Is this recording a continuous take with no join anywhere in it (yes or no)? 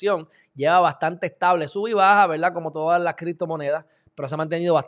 yes